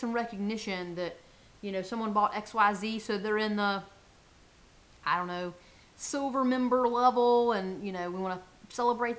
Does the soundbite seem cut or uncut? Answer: uncut